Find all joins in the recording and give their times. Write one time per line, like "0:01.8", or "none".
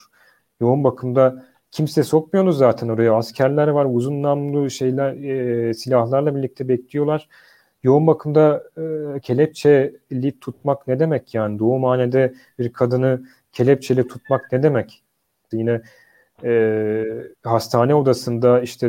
0:15.5
0:17.3